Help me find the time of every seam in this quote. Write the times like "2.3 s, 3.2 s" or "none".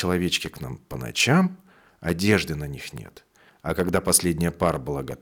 3.5 s

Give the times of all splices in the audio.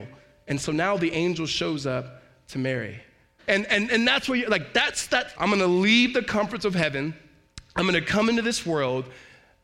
3.4 s, 5.3 s

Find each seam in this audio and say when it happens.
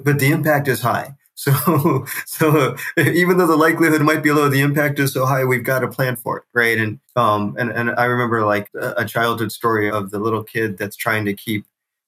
7.0 s, 8.6 s, 9.9 s

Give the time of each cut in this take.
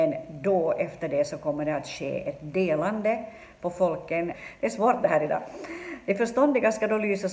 4.3 s

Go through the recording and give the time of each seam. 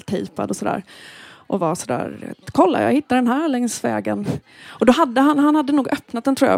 none

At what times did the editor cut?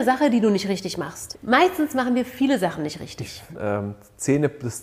1.3 s, 3.5 s

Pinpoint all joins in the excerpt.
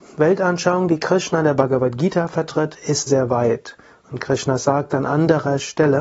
3.1 s

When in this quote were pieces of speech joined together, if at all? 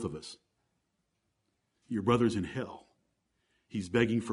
none

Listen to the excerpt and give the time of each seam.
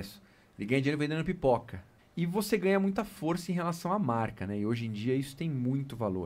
2.0 s

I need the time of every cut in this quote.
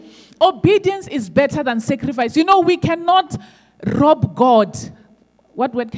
none

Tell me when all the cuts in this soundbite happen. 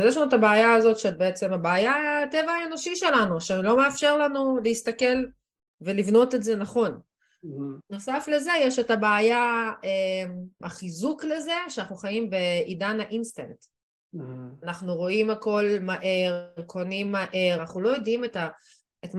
10.6 s, 17.6 s

